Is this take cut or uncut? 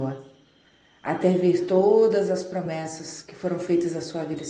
uncut